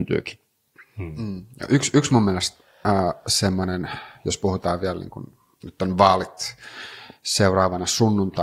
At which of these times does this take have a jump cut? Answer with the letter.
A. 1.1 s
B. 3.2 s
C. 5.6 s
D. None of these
D